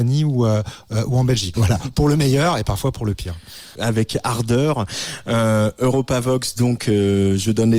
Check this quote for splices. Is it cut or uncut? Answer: cut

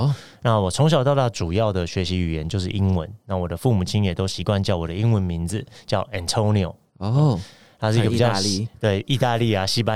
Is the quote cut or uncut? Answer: uncut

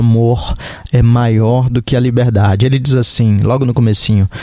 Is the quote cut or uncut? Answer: uncut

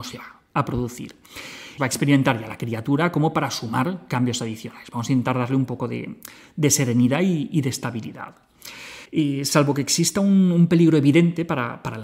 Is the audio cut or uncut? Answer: cut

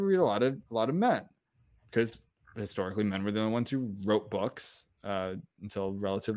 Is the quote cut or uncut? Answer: cut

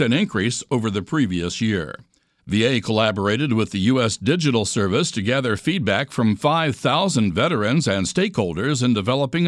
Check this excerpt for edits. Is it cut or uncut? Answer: cut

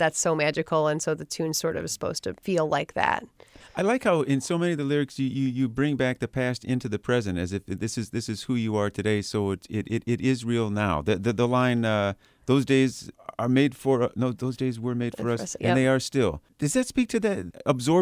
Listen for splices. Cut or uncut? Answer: uncut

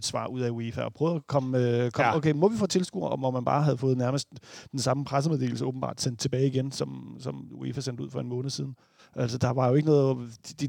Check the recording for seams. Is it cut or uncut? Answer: uncut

